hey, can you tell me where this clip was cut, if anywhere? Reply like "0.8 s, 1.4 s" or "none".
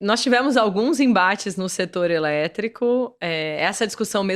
none